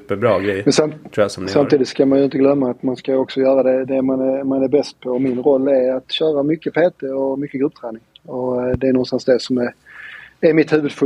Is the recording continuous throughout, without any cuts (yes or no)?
yes